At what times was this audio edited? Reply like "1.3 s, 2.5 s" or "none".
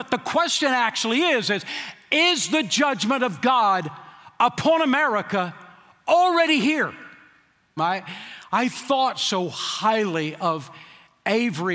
7.8 s

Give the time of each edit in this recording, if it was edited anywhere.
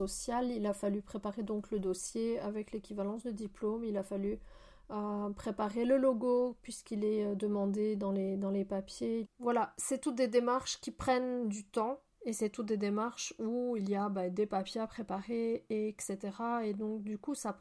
9.2 s

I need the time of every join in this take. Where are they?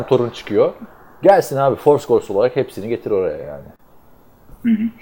none

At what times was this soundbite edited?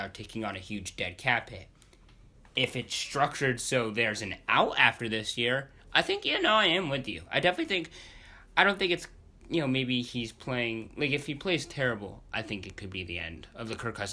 none

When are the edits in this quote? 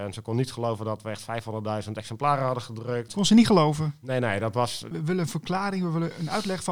3.1 s, 4.9 s

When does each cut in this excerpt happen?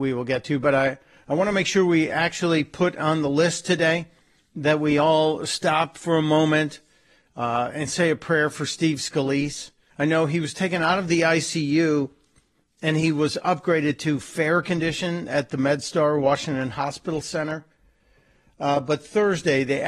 9.9 s

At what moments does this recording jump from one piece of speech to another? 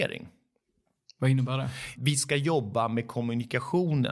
1.9 s

